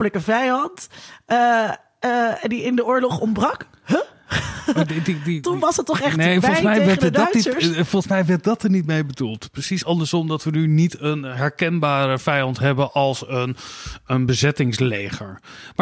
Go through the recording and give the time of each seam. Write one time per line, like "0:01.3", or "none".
none